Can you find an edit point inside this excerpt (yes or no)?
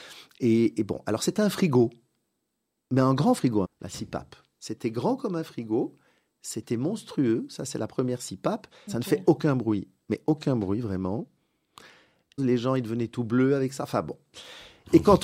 yes